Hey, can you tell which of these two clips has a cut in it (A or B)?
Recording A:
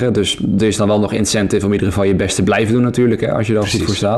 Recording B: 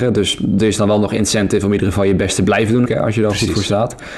B